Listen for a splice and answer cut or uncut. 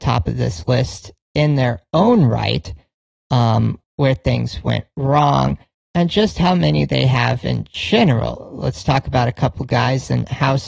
cut